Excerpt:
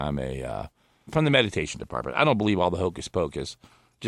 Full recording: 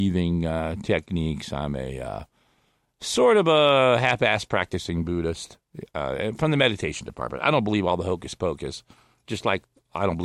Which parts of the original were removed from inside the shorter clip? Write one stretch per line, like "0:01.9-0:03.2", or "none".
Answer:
0:02.6-0:06.3

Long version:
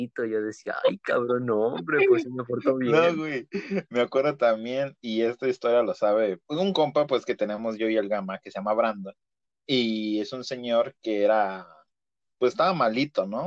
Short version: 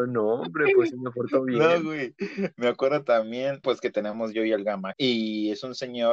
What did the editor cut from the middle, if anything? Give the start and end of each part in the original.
0:05.0-0:07.1
0:08.4-0:09.6

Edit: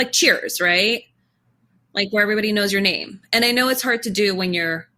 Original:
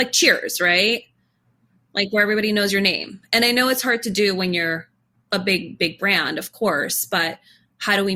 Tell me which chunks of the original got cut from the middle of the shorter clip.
none

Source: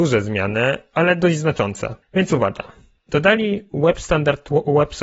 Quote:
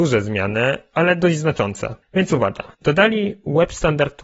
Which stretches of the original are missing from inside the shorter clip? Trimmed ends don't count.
0:02.7-0:03.0

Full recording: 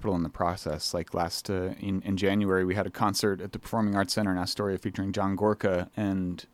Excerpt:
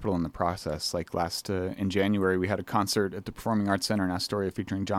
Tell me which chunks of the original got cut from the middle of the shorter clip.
0:01.8-0:02.0

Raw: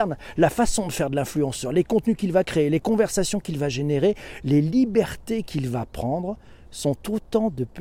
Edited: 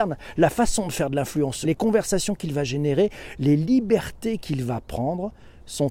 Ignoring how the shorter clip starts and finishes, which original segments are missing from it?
0:01.6-0:02.7

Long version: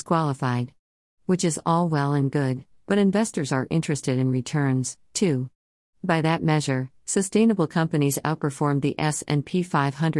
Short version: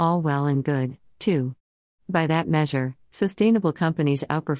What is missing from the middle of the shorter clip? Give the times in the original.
0:02.8-0:05.1

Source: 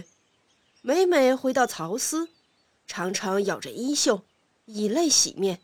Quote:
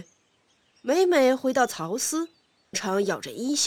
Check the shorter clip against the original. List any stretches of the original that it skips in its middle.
0:02.7-0:03.1

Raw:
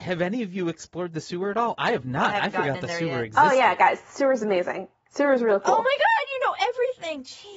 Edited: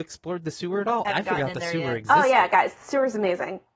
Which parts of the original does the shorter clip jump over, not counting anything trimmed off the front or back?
0:01.7-0:02.3

